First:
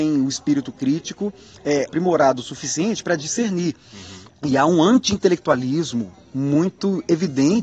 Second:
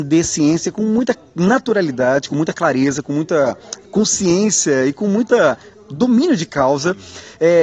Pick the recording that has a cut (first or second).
first